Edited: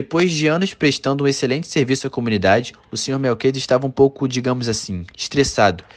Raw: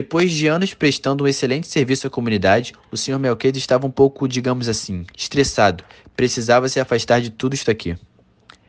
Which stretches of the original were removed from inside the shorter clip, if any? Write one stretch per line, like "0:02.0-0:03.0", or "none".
none